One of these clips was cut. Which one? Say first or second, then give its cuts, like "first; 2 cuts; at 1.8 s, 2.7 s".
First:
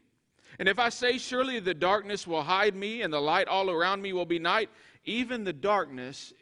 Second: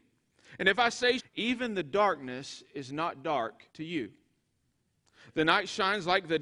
second; 2 cuts; at 1.2 s, 3.7 s